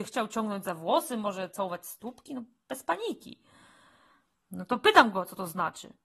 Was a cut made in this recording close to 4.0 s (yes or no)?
no